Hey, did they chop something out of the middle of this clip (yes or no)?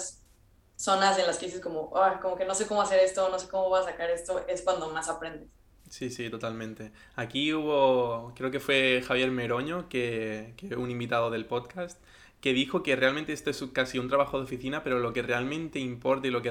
no